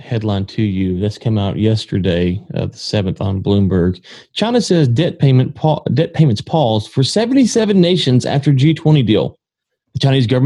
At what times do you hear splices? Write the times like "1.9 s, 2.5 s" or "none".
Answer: none